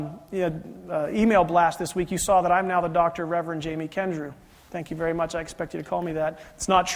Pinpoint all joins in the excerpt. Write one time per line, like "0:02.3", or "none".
none